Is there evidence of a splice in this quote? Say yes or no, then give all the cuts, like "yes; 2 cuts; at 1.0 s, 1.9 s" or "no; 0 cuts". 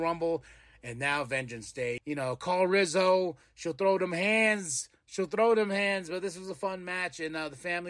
yes; 1 cut; at 2.0 s